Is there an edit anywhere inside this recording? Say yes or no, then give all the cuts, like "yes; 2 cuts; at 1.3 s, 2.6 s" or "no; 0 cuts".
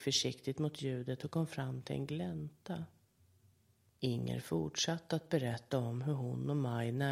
yes; 1 cut; at 4.0 s